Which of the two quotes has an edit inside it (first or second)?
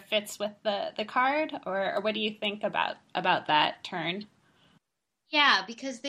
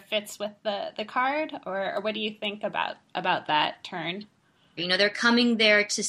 second